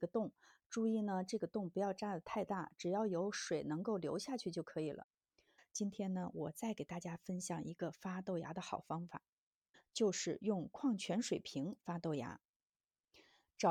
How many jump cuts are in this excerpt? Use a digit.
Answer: 1